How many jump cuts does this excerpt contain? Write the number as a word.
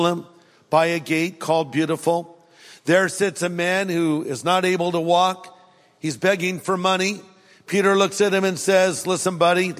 zero